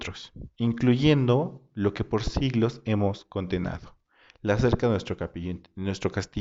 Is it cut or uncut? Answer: uncut